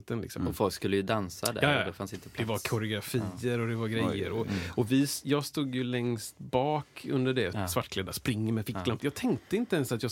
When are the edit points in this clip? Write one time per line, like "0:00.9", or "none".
0:07.5
0:09.0